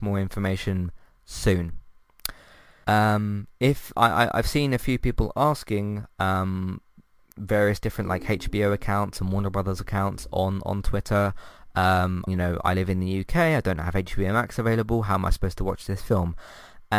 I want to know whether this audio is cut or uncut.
cut